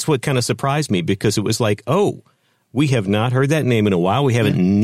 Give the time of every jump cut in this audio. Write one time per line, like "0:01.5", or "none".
none